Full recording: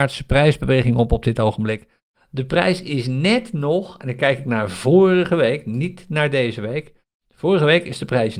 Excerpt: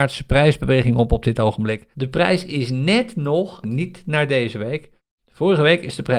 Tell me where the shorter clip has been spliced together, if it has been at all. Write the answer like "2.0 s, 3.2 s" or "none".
1.9 s, 3.6 s